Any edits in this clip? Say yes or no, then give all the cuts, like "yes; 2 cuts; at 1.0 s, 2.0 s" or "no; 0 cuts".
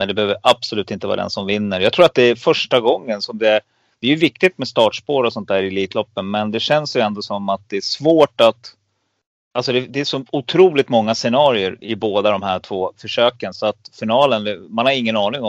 no; 0 cuts